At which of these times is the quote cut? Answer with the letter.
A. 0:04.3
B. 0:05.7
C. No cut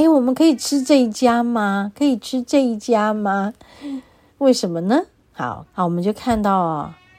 B